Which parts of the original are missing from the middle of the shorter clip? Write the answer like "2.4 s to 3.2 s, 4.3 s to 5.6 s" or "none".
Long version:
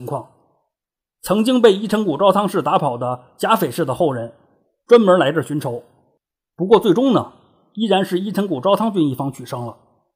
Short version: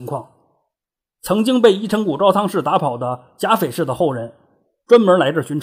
none